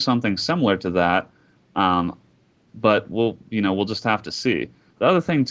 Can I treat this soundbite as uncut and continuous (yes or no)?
yes